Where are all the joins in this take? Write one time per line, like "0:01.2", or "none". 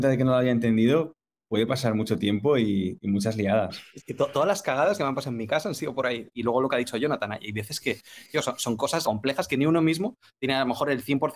0:06.3
0:09.0